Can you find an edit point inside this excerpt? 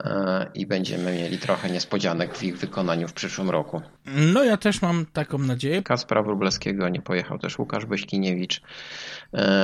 yes; 2 cuts; at 4.0 s, 5.8 s

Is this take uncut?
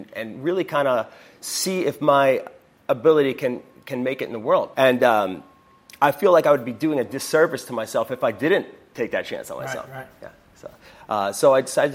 no; 1 cut; at 4.7 s

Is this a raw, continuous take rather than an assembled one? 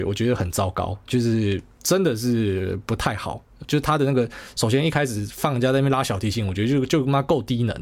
yes; 0 cuts

